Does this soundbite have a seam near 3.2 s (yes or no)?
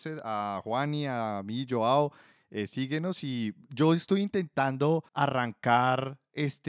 no